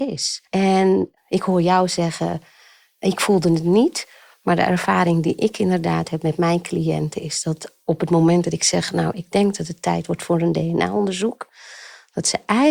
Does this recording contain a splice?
no; 0 cuts

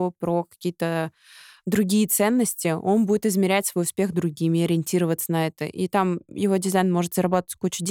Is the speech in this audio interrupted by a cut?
no; 0 cuts

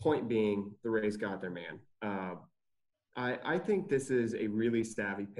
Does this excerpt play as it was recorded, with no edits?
yes; 0 cuts

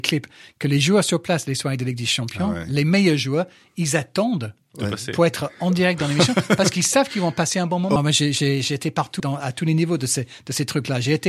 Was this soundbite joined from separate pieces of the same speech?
yes; 2 cuts; at 8.0 s, 9.2 s

